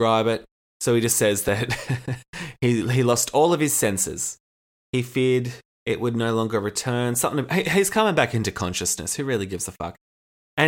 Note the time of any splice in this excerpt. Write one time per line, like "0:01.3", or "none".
0:04.7